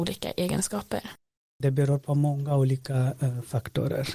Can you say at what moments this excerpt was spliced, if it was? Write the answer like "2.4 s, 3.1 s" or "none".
1.6 s